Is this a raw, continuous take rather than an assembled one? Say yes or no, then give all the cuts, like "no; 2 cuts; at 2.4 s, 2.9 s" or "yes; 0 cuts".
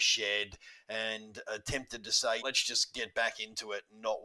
no; 1 cut; at 2.4 s